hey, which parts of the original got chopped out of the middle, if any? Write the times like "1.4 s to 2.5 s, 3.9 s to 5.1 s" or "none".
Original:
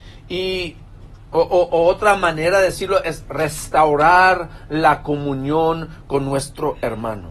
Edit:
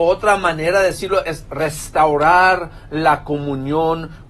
none

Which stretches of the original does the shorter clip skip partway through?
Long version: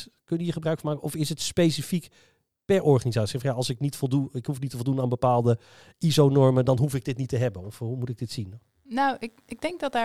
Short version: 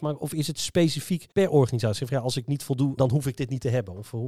2.1 s to 2.6 s, 4.3 s to 6.6 s

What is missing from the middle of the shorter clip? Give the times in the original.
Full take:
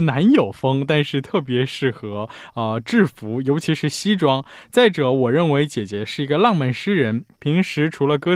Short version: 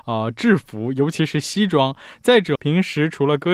5.0 s to 7.4 s

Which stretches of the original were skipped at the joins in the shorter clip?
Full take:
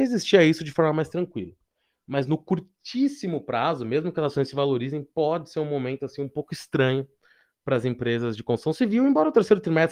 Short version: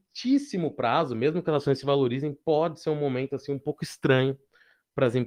none

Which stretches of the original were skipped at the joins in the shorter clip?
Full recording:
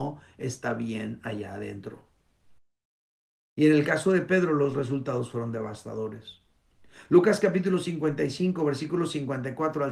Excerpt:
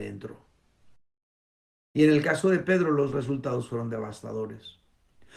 none

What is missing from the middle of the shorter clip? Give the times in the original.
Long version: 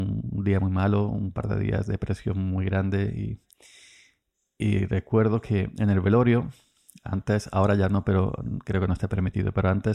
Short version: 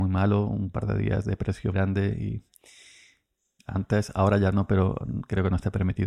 2.3 s to 2.7 s, 4.6 s to 7.0 s

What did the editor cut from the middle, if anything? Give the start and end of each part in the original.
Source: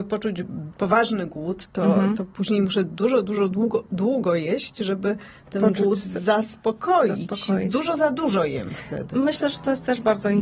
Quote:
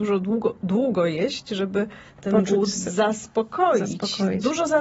none

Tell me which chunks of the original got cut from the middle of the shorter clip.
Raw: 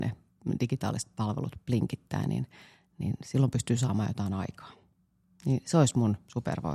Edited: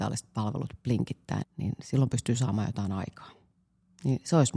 2.2 s to 2.8 s

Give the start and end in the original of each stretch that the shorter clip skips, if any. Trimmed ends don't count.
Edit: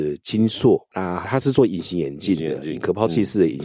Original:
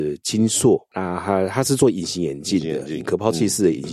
1.2 s to 1.5 s

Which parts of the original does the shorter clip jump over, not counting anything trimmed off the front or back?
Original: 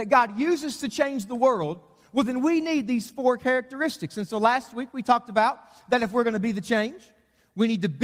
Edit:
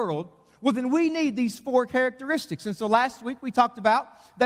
none

